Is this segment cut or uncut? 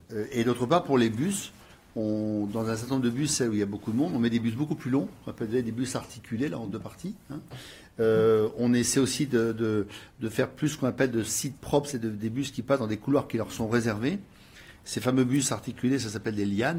uncut